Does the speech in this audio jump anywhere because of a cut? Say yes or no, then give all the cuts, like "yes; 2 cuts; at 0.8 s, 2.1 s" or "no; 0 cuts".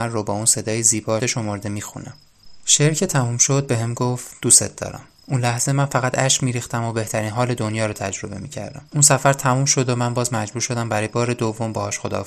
yes; 2 cuts; at 1.2 s, 8.9 s